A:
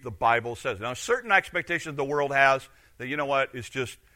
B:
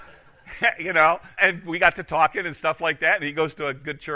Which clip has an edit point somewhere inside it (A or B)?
B